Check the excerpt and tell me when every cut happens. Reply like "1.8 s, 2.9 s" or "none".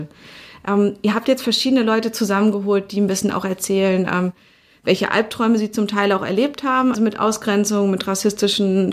6.9 s